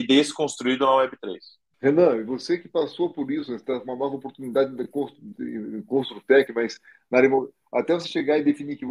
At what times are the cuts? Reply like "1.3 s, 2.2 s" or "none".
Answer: 1.7 s, 6.5 s